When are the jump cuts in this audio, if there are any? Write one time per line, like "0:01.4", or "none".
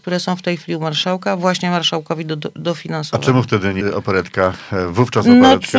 0:03.8